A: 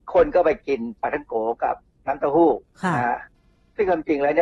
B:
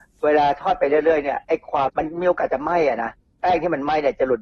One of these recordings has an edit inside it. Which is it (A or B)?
B